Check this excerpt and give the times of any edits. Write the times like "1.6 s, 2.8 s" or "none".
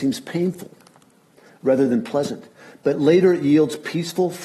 none